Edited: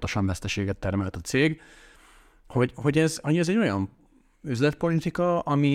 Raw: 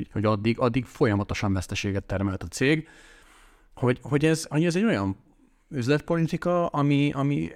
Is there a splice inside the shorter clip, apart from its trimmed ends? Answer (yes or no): no